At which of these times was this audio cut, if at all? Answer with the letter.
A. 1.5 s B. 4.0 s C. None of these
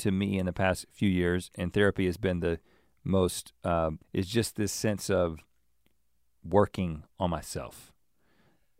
B